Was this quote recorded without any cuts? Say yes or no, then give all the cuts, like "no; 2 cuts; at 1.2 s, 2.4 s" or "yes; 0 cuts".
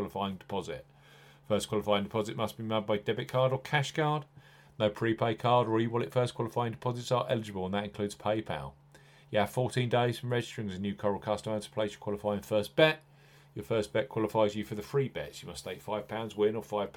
yes; 0 cuts